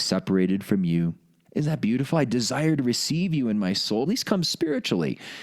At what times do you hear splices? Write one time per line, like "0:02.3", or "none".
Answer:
0:01.4
0:04.1